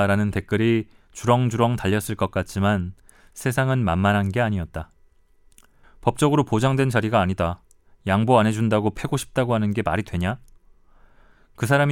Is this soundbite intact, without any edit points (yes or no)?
no